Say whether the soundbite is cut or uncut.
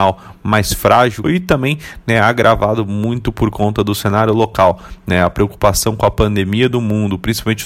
cut